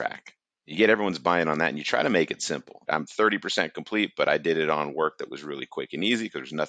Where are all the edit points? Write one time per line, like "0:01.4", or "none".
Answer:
0:02.9

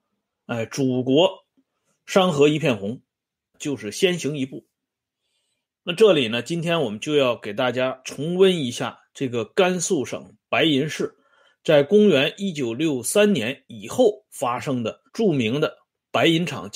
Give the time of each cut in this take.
0:03.5
0:15.1

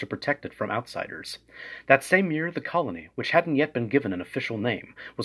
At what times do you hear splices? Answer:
none

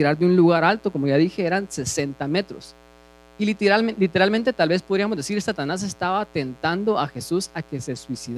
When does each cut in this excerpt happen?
none

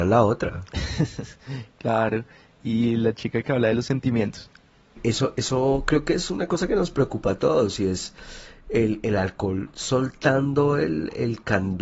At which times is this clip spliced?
none

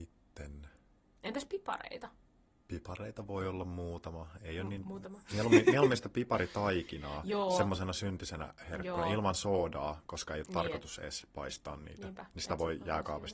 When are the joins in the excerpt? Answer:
none

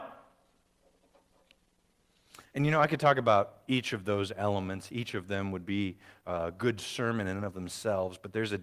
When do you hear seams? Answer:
none

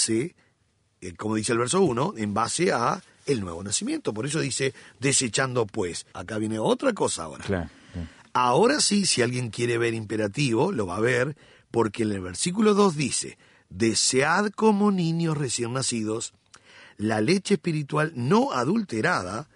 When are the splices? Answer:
0:06.1

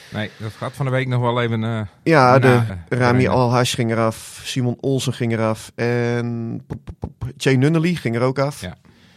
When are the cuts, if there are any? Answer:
0:02.7

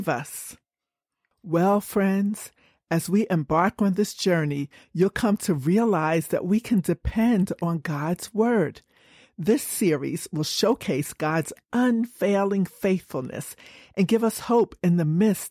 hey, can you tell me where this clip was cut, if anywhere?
0:01.3

